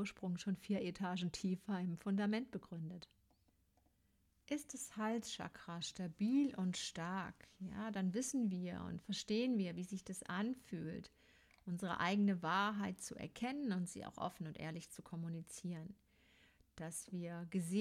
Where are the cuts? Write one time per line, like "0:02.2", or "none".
none